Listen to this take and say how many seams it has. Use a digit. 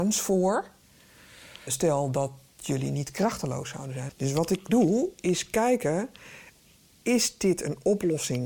2